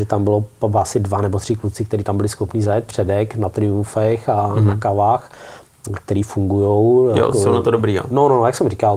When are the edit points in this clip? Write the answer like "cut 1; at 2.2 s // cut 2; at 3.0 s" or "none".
none